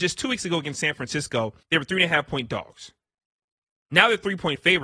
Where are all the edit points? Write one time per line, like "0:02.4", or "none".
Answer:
0:01.6